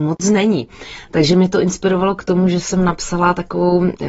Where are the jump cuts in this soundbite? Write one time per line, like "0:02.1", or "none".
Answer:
none